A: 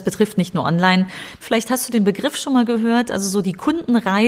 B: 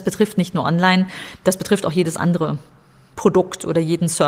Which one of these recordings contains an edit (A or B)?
A